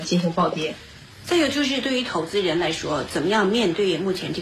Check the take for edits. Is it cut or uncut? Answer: uncut